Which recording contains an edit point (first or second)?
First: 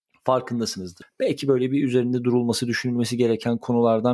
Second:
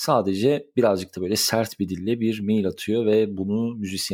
first